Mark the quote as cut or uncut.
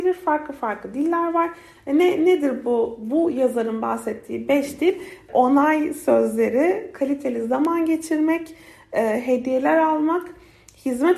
uncut